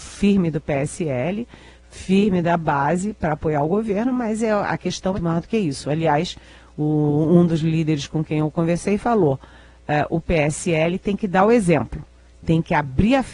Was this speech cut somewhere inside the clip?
yes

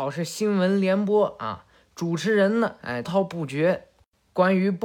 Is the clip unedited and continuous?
no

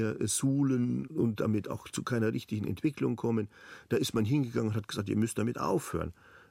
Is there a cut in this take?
no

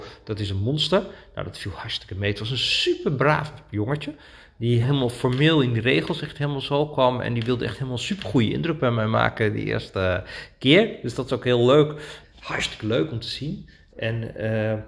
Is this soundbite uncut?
no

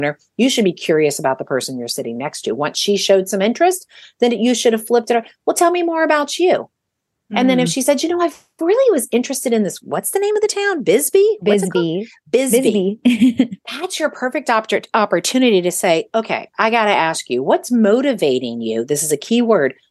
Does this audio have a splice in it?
no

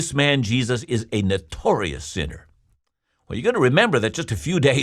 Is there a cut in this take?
no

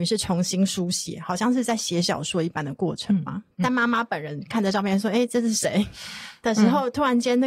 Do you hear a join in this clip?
yes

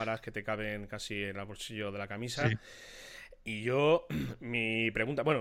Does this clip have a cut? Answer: no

